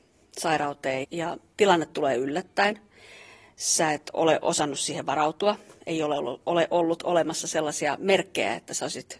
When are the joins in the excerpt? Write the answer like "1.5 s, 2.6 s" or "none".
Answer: 1.0 s, 6.4 s